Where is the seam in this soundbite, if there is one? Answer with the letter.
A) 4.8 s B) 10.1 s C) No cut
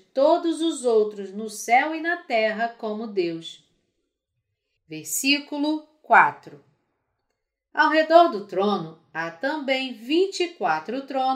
A